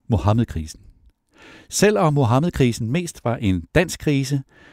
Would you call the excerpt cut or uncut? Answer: uncut